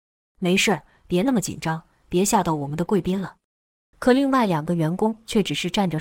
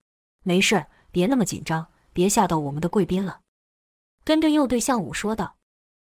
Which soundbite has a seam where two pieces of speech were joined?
first; 1 cut; at 3.9 s

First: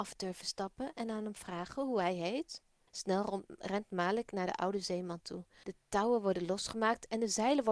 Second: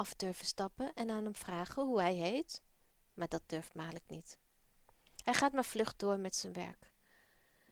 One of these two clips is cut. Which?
first; 2 cuts; at 2.9 s, 5.6 s

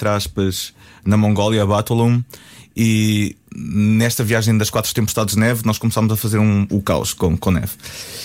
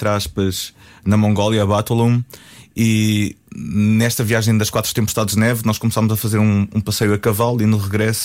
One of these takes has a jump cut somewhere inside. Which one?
first; 1 cut; at 6.7 s

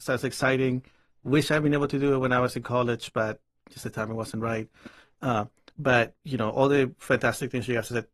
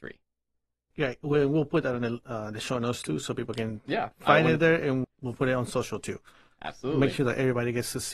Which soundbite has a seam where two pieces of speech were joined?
second; 2 cuts; at 0.9 s, 5.0 s

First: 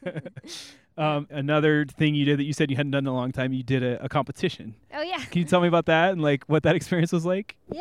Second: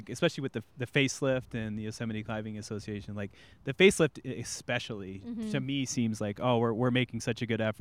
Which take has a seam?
first; 2 cuts; at 1.3 s, 5.3 s

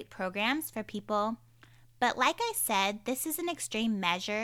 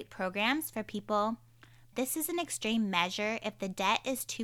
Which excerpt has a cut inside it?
second; 1 cut; at 1.9 s

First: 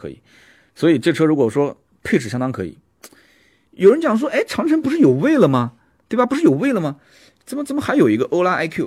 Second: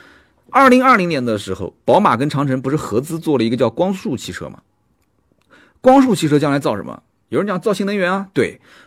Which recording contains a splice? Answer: first; 2 cuts; at 3.6 s, 7.4 s

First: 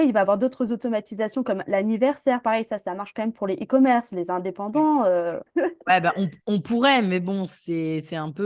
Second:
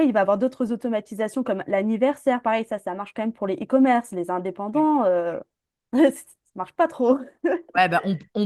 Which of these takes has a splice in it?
first; 1 cut; at 5.5 s

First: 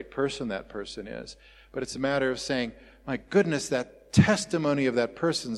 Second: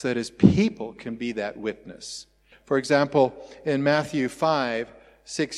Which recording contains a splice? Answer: second; 1 cut; at 2.5 s

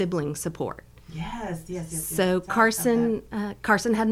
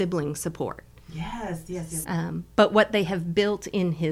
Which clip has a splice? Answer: second; 1 cut; at 2.0 s

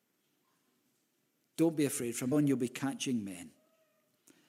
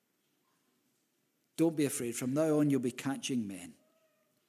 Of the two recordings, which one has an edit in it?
first; 1 cut; at 2.3 s

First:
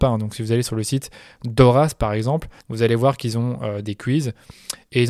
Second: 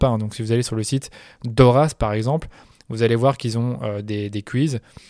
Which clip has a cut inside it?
first; 2 cuts; at 2.6 s, 3.8 s

